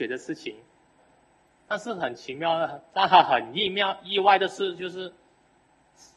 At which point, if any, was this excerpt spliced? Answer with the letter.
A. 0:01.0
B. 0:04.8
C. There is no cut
A